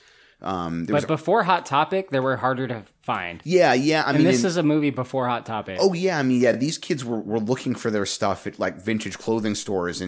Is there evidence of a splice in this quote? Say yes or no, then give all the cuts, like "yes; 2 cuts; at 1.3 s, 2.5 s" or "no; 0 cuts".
no; 0 cuts